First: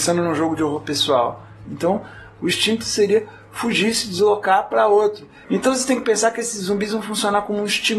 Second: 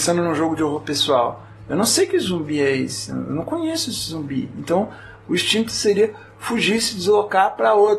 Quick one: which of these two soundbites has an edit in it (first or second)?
first